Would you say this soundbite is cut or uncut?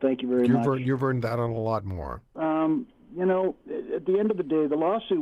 cut